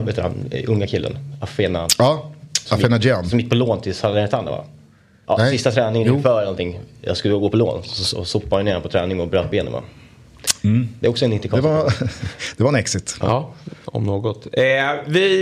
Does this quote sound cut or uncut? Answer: cut